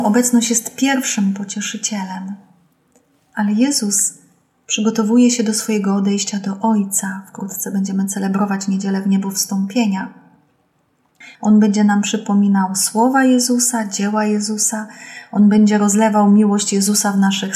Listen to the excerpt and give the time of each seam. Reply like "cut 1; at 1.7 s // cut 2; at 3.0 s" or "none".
cut 1; at 11.3 s